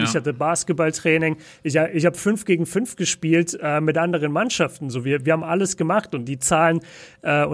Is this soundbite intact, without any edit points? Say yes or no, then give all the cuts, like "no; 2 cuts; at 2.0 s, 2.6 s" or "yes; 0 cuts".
yes; 0 cuts